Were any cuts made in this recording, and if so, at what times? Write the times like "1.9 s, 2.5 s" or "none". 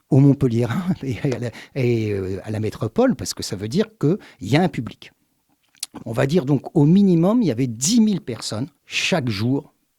6.0 s, 8.8 s